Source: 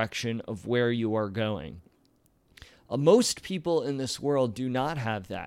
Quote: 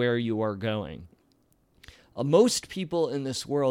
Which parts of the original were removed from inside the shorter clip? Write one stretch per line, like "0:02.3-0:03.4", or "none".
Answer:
none